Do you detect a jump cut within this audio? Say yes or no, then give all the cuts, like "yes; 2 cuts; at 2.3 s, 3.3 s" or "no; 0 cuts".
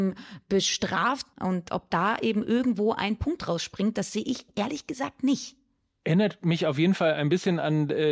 yes; 1 cut; at 1.3 s